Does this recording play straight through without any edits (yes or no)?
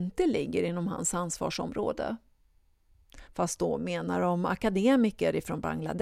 no